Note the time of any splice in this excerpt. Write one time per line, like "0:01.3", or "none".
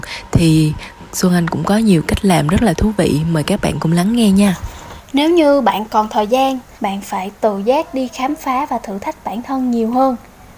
0:06.7